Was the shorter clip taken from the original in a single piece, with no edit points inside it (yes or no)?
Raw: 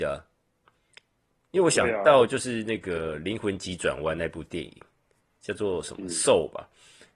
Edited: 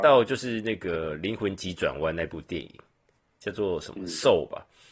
yes